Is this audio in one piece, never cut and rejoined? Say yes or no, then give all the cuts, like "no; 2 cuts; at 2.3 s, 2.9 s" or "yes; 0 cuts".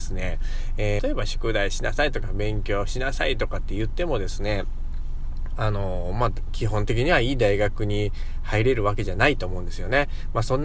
no; 1 cut; at 1.0 s